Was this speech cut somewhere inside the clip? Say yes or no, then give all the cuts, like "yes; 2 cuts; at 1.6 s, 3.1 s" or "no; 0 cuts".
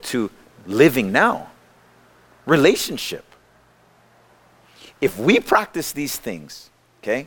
no; 0 cuts